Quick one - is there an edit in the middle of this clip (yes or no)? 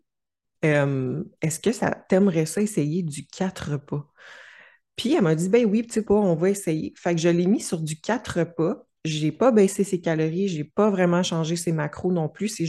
yes